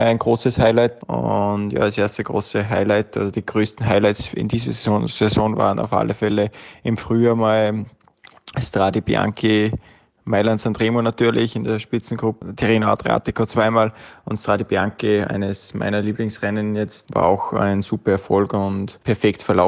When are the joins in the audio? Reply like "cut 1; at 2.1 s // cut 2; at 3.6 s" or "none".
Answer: cut 1; at 1.0 s